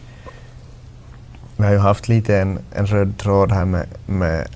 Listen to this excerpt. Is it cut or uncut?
uncut